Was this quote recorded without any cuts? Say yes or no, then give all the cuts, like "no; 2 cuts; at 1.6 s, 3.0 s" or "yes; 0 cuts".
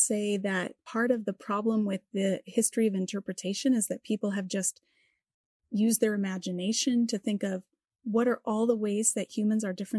yes; 0 cuts